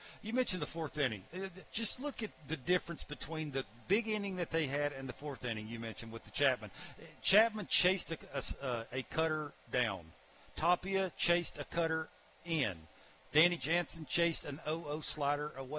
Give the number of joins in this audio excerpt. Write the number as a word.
one